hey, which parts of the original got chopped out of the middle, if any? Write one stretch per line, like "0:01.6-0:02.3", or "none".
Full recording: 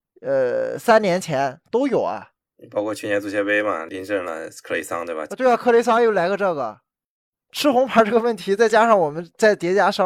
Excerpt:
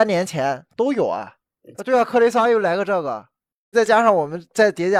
0:02.7-0:05.3
0:07.2-0:08.6